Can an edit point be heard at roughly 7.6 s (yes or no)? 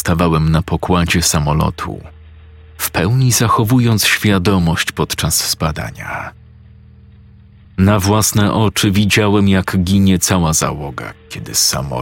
no